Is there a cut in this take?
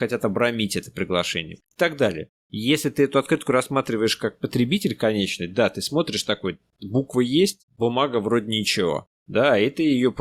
yes; 2 cuts; at 2.4 s, 7.7 s

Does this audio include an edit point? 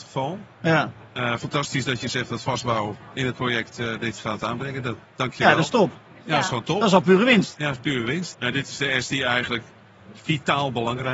yes; 1 cut; at 8.3 s

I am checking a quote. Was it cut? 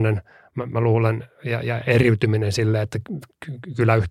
no; 0 cuts

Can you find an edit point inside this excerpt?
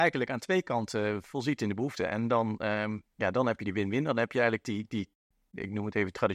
no; 0 cuts

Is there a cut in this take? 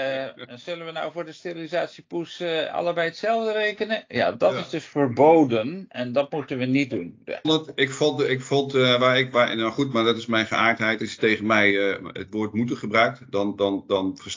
yes; 1 cut; at 7.4 s

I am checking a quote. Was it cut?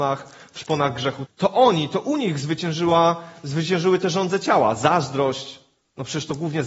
yes; 1 cut; at 1.3 s

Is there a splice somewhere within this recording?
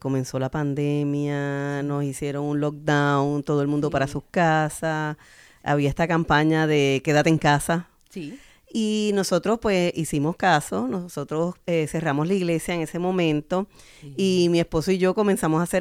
no; 0 cuts

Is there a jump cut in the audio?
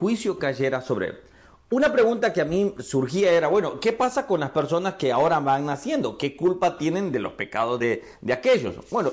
no; 0 cuts

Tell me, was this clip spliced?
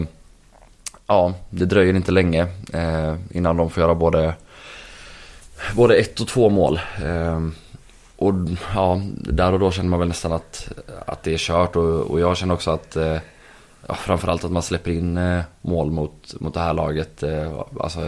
no; 0 cuts

